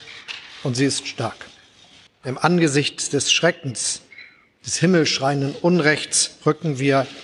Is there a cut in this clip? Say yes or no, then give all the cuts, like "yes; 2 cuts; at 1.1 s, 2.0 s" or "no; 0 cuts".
yes; 1 cut; at 2.1 s